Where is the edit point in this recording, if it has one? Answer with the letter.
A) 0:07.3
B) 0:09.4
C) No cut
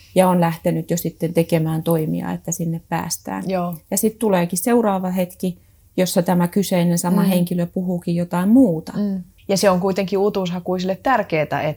B